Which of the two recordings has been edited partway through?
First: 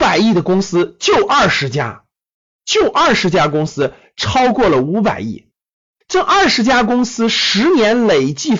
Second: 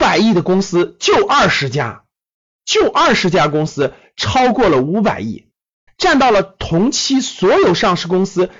second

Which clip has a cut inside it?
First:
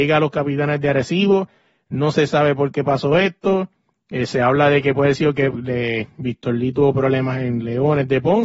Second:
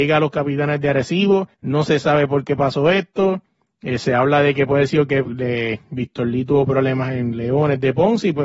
second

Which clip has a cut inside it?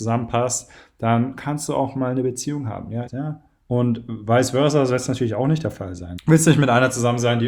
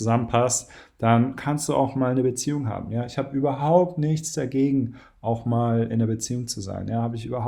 first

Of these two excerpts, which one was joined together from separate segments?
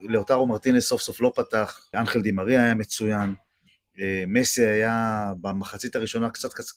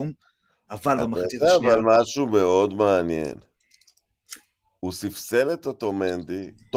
first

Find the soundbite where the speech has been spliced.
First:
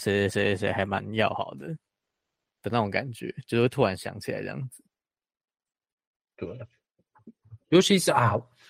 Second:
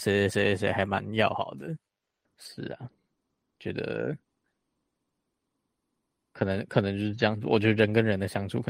second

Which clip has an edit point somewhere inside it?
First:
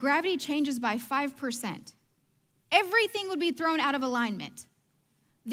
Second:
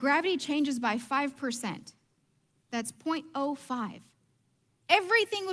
first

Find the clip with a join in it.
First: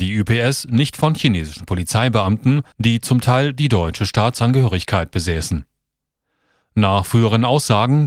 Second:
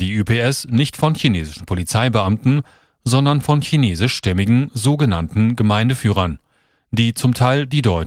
first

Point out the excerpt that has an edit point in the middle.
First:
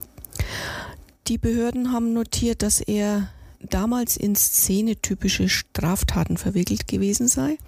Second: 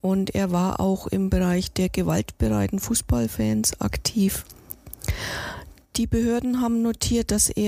first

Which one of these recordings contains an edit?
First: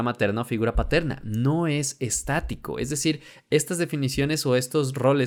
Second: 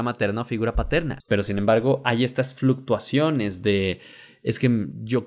second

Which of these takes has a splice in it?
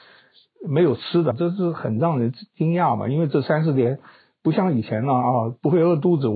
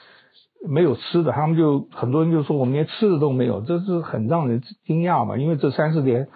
first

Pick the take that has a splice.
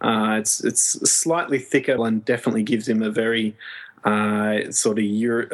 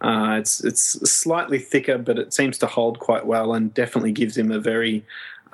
first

